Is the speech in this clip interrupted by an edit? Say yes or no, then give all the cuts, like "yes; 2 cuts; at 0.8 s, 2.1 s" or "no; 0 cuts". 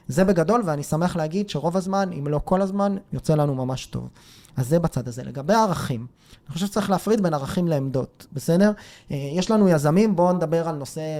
no; 0 cuts